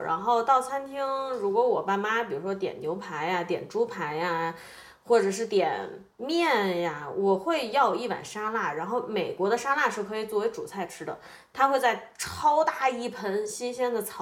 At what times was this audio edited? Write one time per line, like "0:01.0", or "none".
none